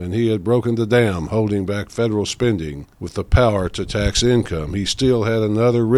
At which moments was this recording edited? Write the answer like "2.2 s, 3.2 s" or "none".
2.9 s